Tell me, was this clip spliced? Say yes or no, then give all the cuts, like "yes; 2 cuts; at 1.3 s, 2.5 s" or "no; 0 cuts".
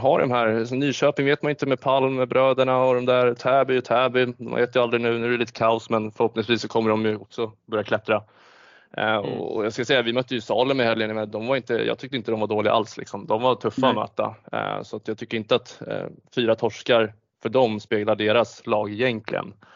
no; 0 cuts